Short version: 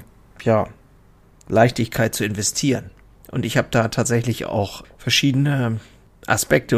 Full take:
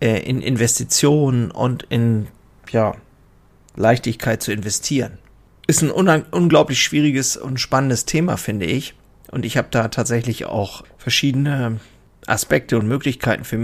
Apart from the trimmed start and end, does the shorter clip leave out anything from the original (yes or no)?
yes